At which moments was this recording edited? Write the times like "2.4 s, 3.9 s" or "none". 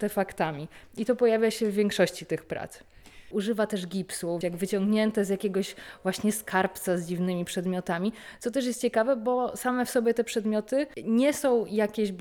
3.3 s, 4.4 s